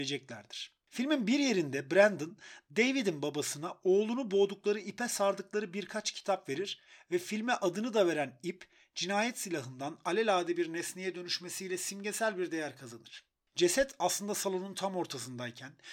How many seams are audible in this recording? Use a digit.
0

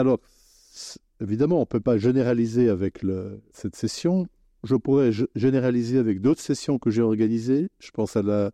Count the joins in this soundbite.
1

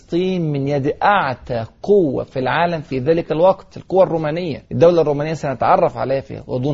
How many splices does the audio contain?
1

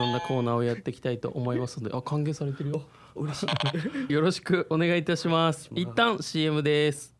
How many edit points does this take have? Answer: 1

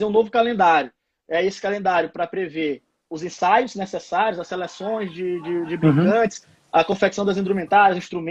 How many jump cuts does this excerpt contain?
0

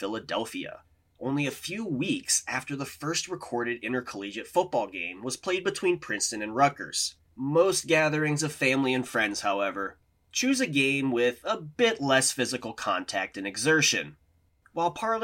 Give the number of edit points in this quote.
1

